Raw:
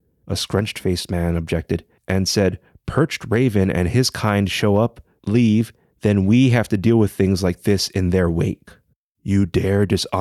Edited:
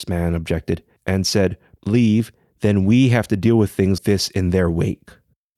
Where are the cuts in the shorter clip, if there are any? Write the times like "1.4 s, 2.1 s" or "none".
1.8 s, 4.0 s